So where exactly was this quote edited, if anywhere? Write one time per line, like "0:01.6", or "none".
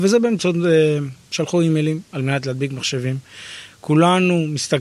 0:01.3